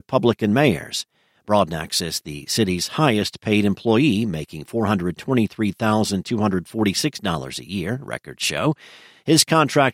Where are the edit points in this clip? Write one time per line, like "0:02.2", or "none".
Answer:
0:01.3